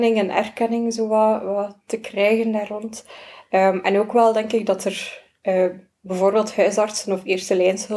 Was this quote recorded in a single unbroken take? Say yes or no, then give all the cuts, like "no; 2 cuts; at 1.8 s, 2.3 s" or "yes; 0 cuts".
yes; 0 cuts